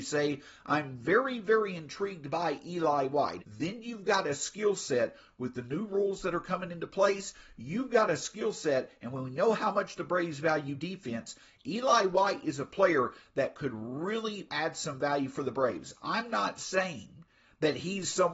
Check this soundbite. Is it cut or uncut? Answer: cut